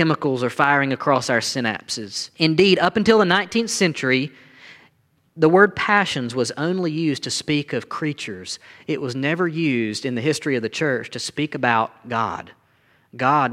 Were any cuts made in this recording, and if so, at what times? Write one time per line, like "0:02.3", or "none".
0:02.3